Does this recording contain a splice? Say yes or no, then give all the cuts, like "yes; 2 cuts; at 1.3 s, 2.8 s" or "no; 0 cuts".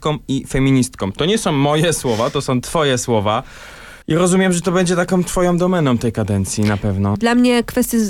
yes; 2 cuts; at 4.0 s, 7.2 s